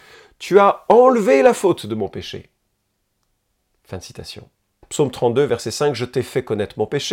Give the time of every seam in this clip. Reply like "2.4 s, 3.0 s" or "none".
4.8 s